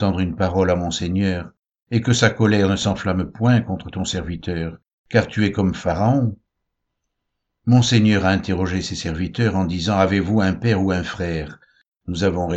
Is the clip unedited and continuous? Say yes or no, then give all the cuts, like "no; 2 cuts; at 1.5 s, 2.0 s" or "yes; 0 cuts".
yes; 0 cuts